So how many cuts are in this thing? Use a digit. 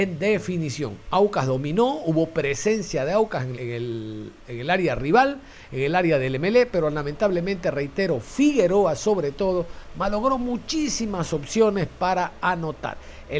1